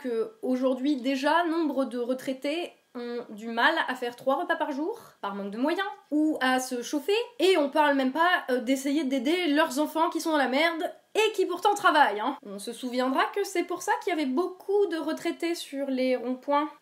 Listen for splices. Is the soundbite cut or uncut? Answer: uncut